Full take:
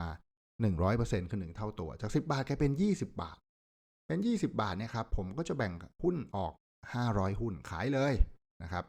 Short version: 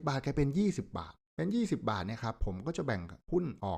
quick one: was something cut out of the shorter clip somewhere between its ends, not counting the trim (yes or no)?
yes